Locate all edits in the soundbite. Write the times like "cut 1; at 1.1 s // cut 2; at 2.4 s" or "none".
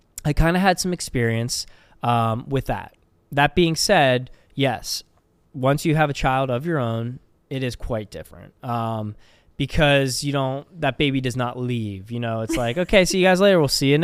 none